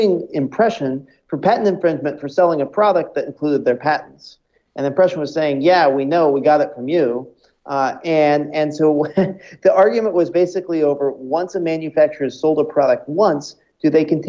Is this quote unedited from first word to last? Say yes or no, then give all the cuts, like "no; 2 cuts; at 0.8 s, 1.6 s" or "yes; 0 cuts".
yes; 0 cuts